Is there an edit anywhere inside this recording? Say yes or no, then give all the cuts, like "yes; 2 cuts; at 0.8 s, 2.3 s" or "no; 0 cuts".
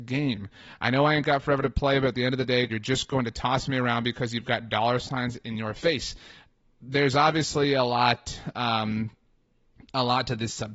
yes; 1 cut; at 2.7 s